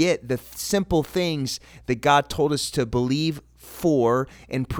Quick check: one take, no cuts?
yes; 0 cuts

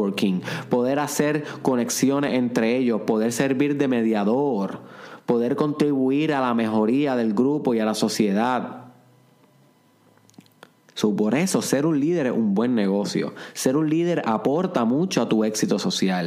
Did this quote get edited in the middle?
no; 0 cuts

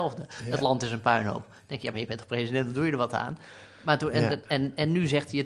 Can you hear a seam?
no; 0 cuts

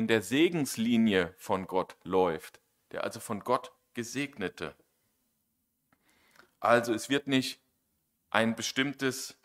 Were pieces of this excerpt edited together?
no; 0 cuts

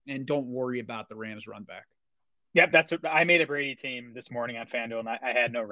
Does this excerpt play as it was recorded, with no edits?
yes; 0 cuts

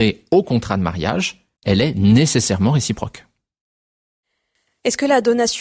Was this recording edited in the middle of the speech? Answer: yes; 1 cut; at 1.6 s

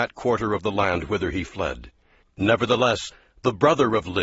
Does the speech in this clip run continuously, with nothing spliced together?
no; 1 cut; at 2.2 s

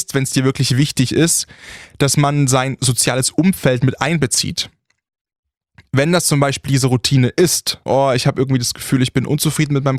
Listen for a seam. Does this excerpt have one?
yes; 1 cut; at 7.9 s

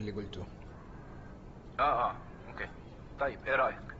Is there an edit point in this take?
no; 0 cuts

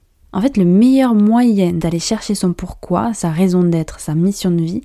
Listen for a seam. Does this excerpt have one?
no; 0 cuts

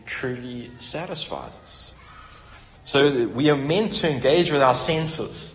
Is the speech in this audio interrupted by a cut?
no; 0 cuts

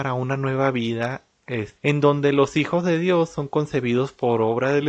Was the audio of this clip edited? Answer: yes; 1 cut; at 1.8 s

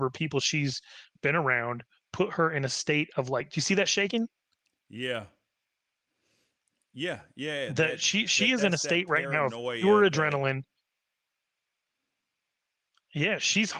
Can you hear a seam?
no; 0 cuts

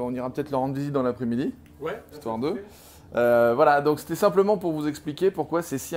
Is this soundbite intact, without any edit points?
no; 1 cut; at 2.1 s

